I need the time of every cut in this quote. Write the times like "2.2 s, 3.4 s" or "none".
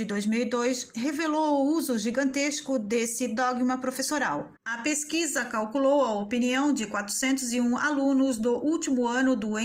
4.6 s